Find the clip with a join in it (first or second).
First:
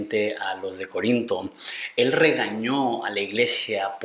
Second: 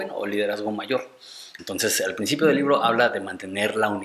second